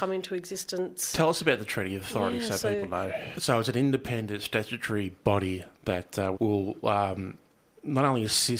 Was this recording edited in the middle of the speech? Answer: yes; 2 cuts; at 3.3 s, 6.3 s

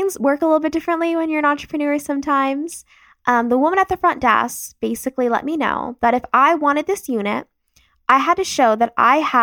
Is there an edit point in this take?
no; 0 cuts

